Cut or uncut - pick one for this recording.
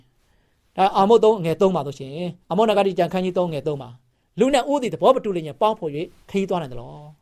cut